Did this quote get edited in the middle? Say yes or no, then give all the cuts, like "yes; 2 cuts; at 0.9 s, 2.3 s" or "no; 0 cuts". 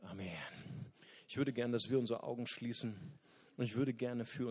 no; 0 cuts